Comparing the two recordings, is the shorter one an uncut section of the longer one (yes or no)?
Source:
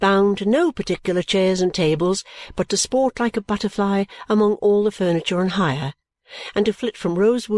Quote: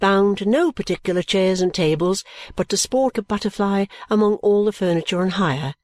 no